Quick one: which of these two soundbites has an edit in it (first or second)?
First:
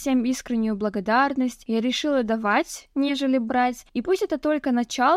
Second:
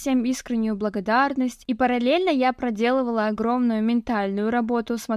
second